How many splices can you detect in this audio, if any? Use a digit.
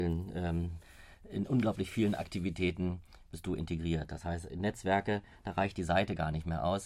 0